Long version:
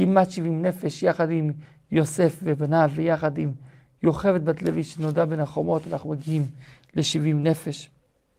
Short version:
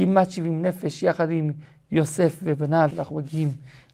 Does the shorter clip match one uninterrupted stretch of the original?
no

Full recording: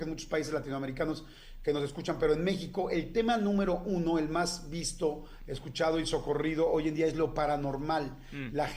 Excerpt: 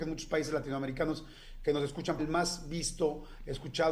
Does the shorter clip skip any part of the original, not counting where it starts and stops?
yes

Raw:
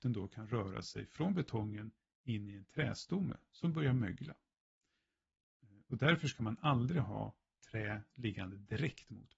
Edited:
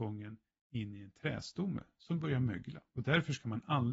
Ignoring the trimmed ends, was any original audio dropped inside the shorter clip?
yes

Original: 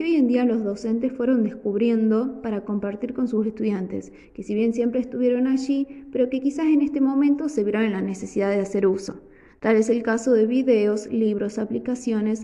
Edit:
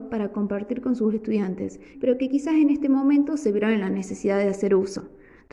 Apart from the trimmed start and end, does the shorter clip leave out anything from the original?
yes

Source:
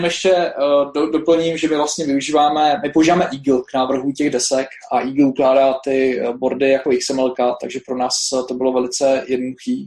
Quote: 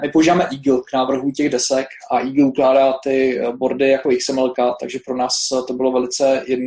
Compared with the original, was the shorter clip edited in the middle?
no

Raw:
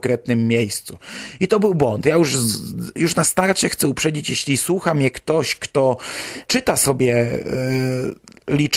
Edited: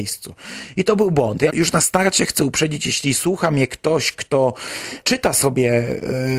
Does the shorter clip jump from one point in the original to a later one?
yes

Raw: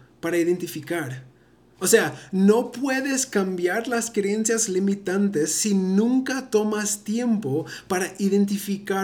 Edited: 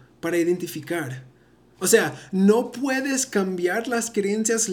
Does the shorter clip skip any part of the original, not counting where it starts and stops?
no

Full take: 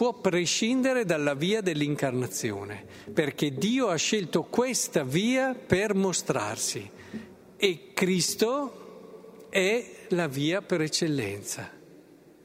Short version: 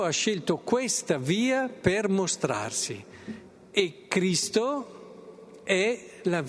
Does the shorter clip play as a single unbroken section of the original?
yes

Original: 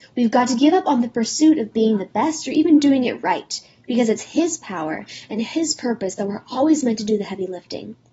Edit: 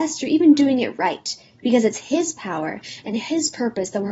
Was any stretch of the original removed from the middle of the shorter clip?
no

